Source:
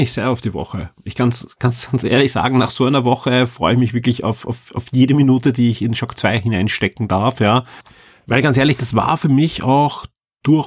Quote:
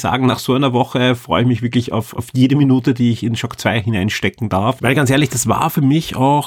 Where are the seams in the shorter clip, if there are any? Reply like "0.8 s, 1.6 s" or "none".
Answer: 2.1 s, 4.8 s